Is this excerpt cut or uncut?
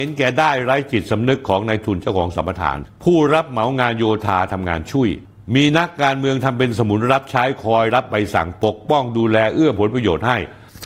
uncut